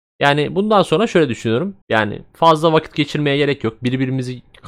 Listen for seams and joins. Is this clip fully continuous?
no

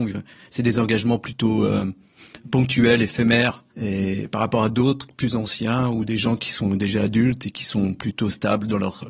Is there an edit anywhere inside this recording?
yes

